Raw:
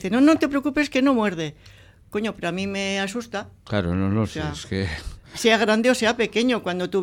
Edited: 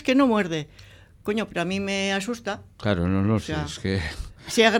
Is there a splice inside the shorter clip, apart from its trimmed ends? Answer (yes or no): no